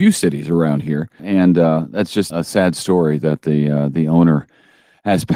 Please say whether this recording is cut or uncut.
cut